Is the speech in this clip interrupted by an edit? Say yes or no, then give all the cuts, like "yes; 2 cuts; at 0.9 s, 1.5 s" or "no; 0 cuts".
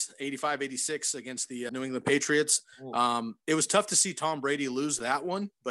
yes; 1 cut; at 1.7 s